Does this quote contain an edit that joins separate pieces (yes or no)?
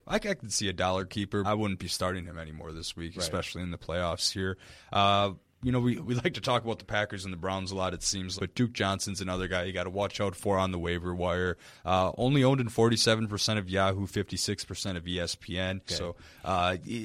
yes